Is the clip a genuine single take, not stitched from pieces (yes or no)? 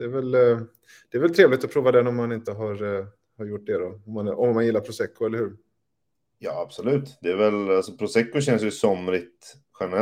yes